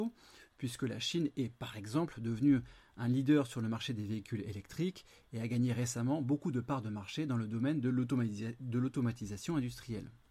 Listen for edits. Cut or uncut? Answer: uncut